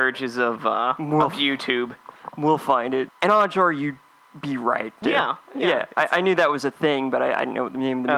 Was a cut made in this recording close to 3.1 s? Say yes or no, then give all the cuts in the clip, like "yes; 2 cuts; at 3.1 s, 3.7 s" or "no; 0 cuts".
yes; 2 cuts; at 3.1 s, 5.0 s